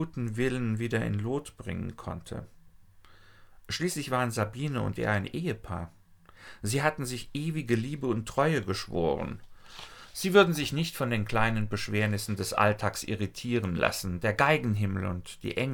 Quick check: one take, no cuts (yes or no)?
yes